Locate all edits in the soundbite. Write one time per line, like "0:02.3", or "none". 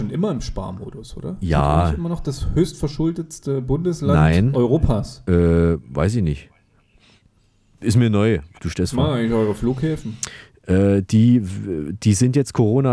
0:08.6